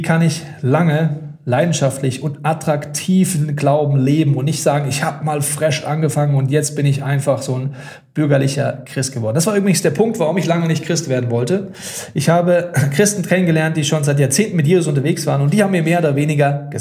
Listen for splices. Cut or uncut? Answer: uncut